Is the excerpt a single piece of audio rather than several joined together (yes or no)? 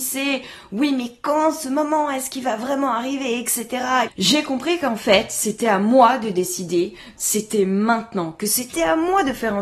no